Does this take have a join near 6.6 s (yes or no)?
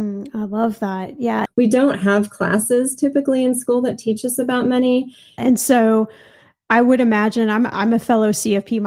no